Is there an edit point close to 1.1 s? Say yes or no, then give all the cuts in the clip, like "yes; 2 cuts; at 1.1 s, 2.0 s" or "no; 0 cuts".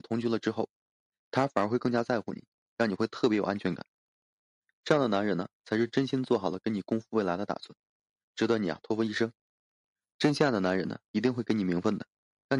no; 2 cuts; at 2.6 s, 10.1 s